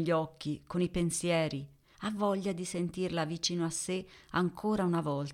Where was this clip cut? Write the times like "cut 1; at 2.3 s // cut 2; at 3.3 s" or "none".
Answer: cut 1; at 1.9 s